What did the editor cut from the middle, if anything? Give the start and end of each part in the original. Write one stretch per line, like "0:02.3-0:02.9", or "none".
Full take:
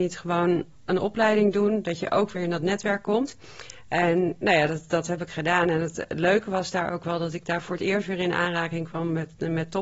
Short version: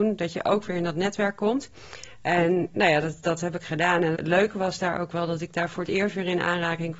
0:05.8-0:06.1